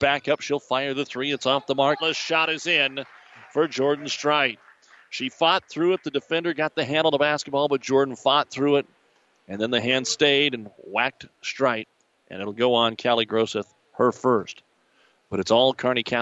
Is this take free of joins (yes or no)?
no